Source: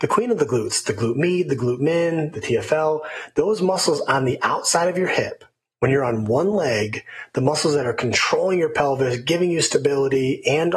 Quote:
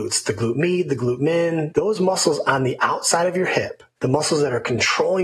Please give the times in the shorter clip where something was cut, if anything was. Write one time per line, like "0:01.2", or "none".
0:01.7
0:04.0